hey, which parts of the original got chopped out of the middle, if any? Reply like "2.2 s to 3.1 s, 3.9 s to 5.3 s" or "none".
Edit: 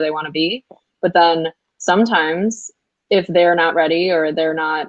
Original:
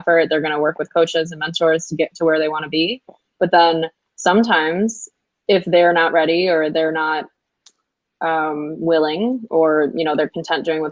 none